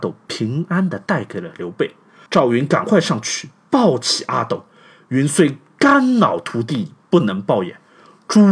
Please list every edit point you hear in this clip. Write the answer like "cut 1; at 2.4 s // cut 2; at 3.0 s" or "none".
cut 1; at 2.3 s